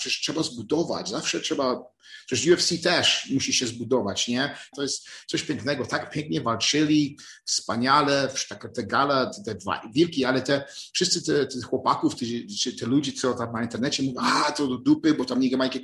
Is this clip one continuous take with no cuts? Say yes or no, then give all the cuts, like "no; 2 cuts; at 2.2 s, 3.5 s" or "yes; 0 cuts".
no; 1 cut; at 4.7 s